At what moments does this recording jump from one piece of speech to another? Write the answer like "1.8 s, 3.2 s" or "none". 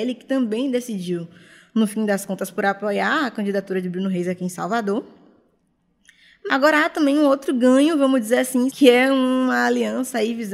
6.5 s, 8.7 s